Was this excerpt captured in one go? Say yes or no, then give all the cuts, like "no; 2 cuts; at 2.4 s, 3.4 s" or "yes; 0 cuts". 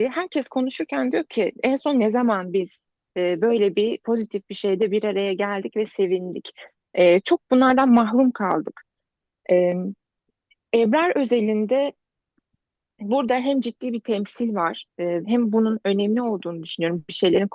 no; 1 cut; at 15.2 s